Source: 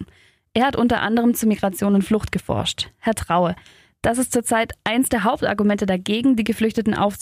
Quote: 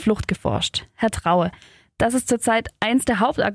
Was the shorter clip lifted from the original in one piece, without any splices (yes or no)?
yes